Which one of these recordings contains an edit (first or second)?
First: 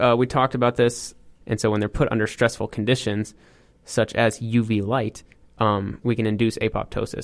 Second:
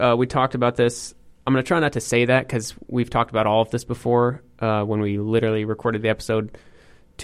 first